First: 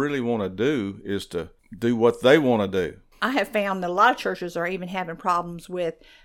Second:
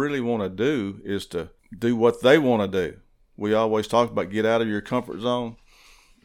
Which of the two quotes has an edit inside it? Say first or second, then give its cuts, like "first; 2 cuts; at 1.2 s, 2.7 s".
first; 1 cut; at 3.1 s